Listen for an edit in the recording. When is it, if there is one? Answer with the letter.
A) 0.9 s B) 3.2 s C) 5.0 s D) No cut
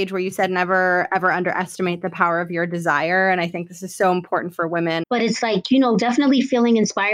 C